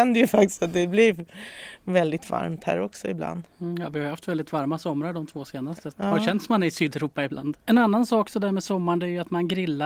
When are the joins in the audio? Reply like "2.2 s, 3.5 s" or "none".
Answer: 5.9 s, 7.6 s